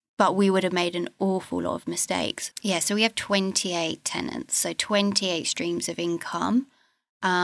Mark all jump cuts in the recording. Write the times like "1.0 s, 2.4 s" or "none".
2.5 s